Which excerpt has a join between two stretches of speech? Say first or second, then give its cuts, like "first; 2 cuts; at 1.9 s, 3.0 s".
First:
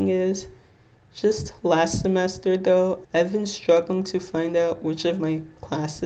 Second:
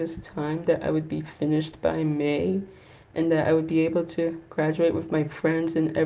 first; 1 cut; at 3.0 s